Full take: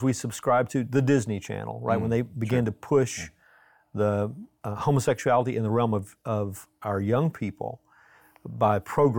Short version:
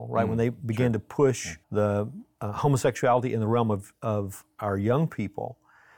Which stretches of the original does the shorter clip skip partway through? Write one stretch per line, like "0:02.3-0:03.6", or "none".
0:03.4-0:03.9